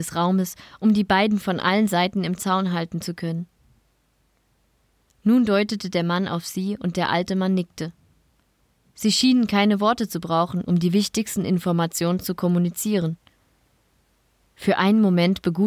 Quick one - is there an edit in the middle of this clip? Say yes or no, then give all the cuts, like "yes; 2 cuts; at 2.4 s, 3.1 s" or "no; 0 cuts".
no; 0 cuts